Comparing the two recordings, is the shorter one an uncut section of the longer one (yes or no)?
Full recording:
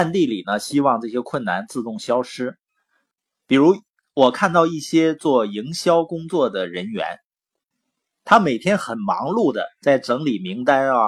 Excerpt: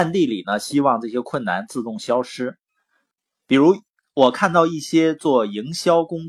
yes